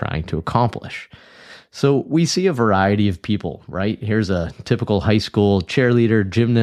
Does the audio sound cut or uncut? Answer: uncut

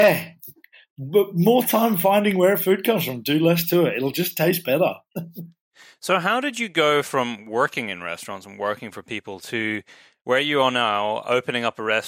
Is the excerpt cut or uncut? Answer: uncut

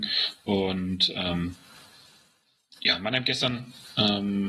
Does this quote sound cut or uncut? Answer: uncut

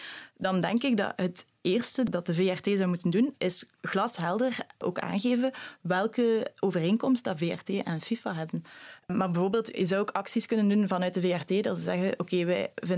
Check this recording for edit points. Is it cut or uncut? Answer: uncut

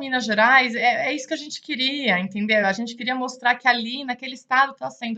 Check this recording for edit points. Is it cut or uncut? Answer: uncut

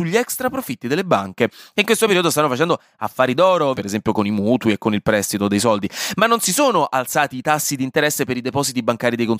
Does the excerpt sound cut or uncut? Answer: cut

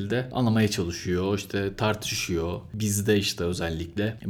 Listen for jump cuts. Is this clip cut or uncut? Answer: uncut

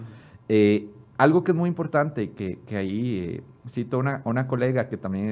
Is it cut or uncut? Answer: uncut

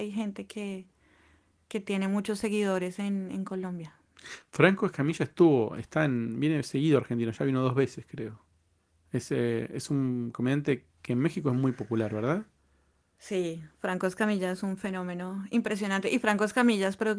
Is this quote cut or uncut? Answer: uncut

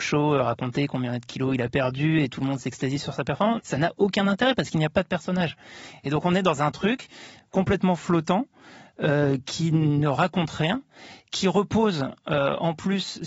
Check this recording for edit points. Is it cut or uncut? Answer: cut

